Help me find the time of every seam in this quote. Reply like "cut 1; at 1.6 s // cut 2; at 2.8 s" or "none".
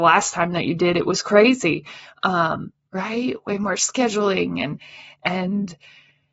cut 1; at 2.9 s